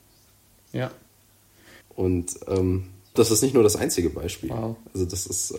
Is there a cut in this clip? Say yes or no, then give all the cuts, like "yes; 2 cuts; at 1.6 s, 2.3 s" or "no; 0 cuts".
yes; 2 cuts; at 1.8 s, 3.2 s